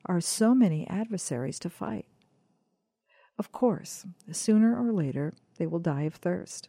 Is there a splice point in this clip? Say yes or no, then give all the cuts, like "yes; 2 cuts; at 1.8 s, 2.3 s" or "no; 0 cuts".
no; 0 cuts